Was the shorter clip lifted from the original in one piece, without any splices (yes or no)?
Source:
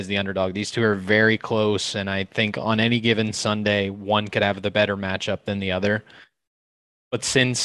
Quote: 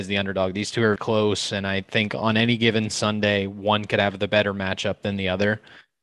no